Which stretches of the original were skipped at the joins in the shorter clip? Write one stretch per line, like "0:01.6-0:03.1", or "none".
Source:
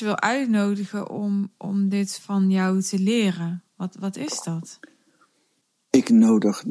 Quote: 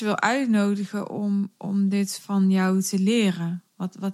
none